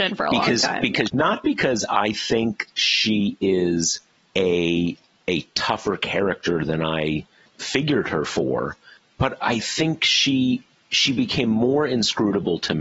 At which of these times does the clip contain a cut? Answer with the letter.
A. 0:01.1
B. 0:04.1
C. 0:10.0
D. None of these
A